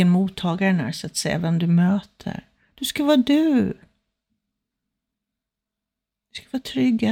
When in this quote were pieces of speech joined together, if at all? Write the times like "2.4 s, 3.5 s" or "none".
none